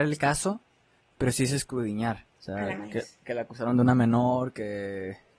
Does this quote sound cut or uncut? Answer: cut